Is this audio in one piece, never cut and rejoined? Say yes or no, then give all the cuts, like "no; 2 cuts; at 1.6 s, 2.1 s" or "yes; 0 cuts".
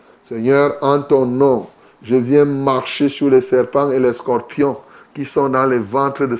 yes; 0 cuts